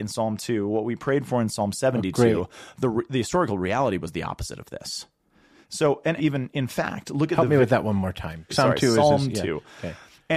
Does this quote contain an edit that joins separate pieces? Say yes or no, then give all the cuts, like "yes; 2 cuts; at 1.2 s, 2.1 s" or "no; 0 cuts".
yes; 2 cuts; at 6.2 s, 8.5 s